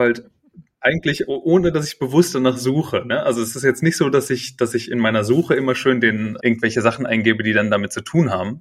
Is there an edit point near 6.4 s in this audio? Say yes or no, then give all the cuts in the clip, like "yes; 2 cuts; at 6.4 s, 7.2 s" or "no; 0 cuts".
yes; 1 cut; at 6.4 s